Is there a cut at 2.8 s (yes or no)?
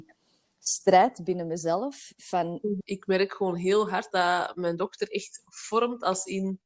yes